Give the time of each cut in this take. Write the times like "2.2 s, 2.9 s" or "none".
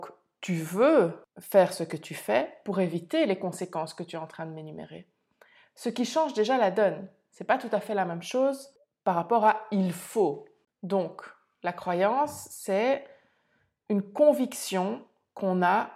none